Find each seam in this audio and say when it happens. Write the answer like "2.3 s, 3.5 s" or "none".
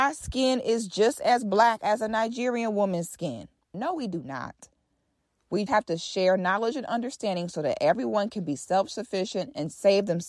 3.7 s, 5.7 s